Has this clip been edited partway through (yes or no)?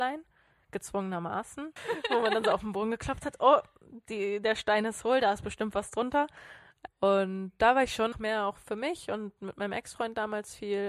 yes